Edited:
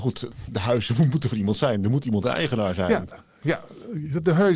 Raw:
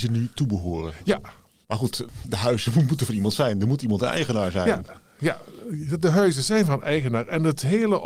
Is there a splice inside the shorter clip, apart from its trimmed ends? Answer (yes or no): no